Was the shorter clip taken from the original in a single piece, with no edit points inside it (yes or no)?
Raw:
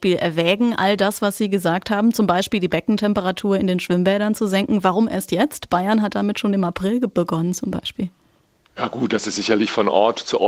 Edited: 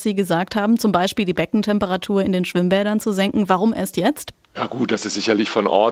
no